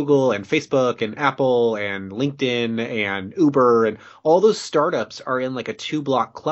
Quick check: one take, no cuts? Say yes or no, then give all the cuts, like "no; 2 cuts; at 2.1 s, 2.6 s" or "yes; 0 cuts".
yes; 0 cuts